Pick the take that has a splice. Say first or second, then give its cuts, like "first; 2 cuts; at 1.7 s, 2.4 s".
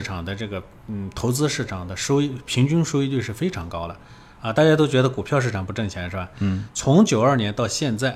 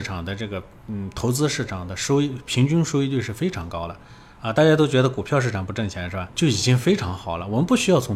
second; 1 cut; at 6.3 s